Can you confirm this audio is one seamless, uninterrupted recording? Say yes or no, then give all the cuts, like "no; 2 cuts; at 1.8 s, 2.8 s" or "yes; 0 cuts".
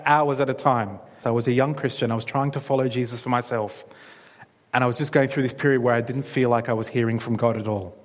no; 1 cut; at 1.2 s